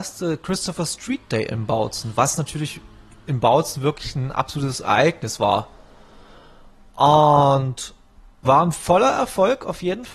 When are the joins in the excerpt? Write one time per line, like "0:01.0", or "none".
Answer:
0:08.4